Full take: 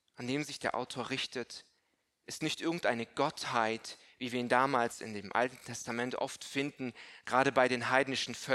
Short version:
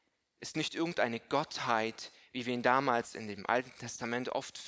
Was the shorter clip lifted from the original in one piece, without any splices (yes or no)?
yes